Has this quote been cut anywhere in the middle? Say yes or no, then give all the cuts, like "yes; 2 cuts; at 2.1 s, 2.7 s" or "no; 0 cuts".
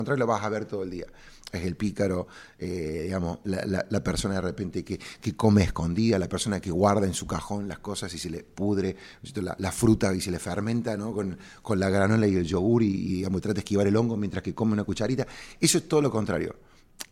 no; 0 cuts